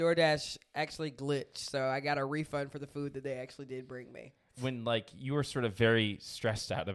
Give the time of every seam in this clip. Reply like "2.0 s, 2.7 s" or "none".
4.5 s